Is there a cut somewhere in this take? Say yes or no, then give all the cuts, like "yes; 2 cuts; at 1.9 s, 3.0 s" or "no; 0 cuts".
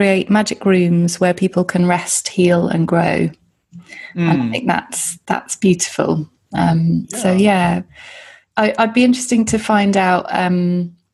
no; 0 cuts